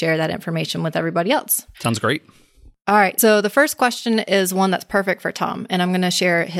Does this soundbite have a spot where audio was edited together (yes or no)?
yes